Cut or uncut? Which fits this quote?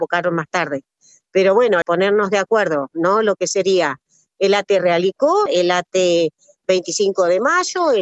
cut